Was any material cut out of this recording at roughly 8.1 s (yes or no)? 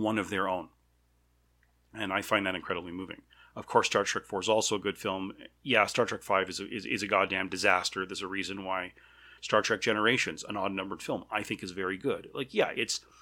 no